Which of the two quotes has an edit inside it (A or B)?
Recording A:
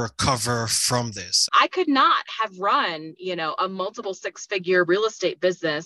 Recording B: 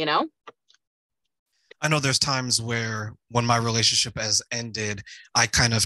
A